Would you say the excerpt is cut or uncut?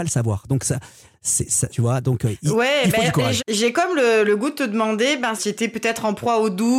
cut